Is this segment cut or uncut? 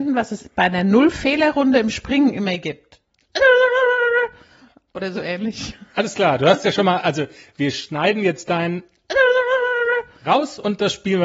uncut